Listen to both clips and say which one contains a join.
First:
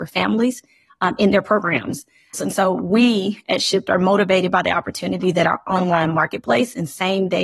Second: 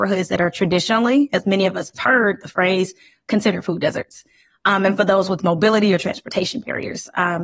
first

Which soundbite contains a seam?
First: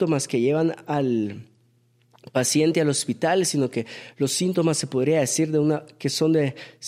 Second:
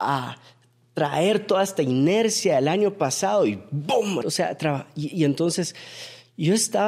second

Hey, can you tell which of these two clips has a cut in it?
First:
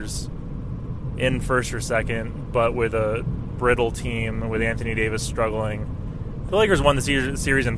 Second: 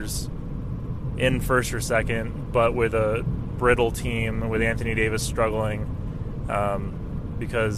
first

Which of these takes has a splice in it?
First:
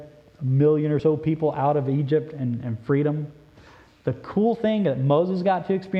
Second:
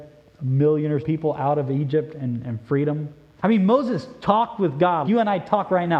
second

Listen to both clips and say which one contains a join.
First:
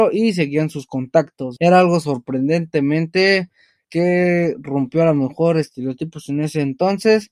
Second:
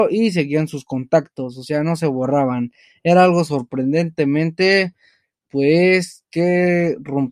first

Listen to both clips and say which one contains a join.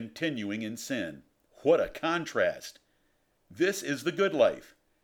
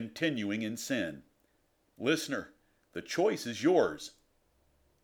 first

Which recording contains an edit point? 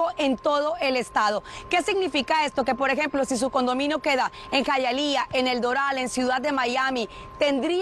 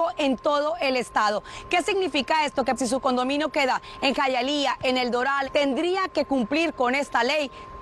second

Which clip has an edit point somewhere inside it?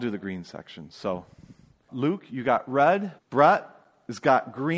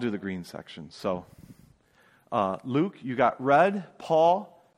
first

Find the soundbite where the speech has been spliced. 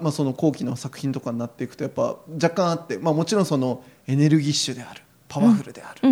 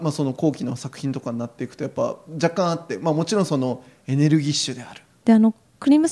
second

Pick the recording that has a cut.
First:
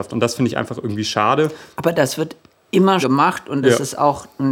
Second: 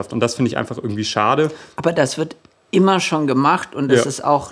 first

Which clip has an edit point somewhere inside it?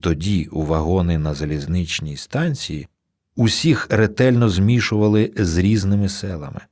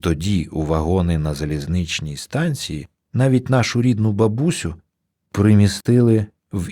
second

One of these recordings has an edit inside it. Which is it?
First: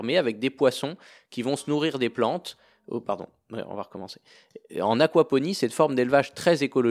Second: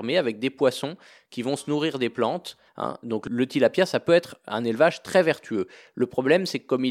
second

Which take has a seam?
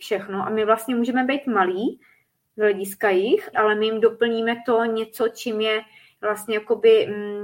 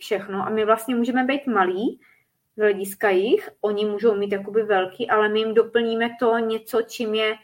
first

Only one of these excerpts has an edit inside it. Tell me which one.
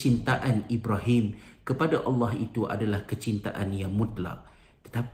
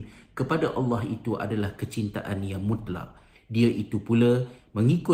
second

